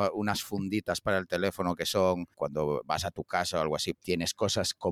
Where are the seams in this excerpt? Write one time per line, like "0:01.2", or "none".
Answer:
0:02.3
0:03.9

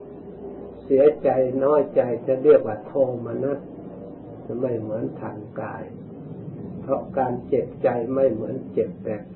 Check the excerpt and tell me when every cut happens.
none

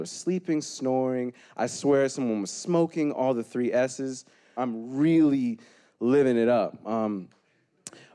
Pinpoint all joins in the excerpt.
0:04.6

